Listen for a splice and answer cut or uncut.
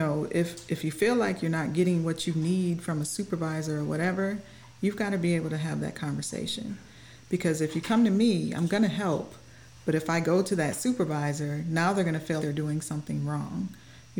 cut